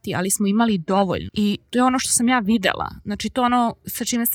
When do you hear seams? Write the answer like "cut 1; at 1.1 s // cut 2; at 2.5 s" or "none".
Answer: cut 1; at 1.3 s